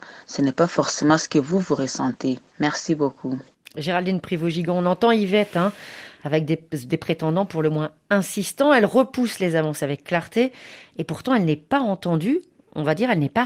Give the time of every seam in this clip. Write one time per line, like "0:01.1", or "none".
0:02.5